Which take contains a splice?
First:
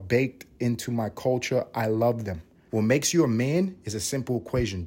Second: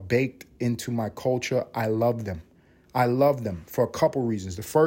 first; 1 cut; at 2.7 s

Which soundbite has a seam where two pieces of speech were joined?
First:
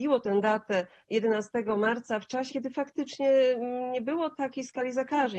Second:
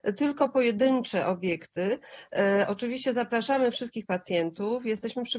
first; 1 cut; at 2.5 s

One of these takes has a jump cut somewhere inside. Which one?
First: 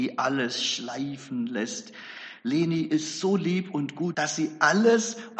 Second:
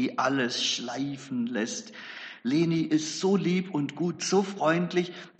first; 1 cut; at 4.1 s

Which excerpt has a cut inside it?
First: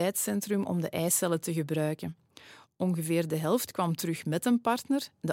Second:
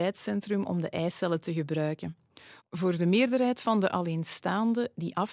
second; 1 cut; at 2.6 s

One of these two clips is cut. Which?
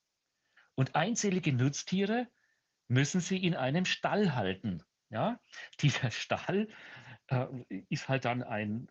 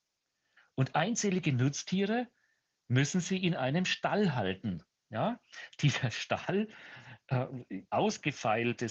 second; 1 cut; at 7.9 s

